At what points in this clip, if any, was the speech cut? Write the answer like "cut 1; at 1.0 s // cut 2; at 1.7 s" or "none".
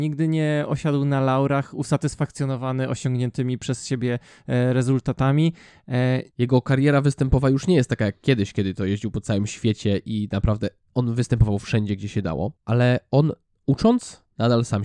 cut 1; at 6.3 s // cut 2; at 12.6 s